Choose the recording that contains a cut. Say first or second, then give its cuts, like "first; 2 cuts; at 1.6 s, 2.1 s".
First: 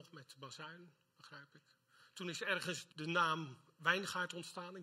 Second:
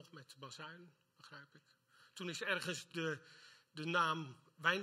first; 1 cut; at 2.9 s